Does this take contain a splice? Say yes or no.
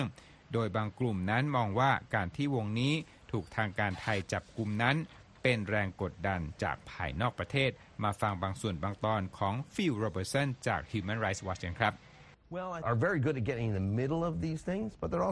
yes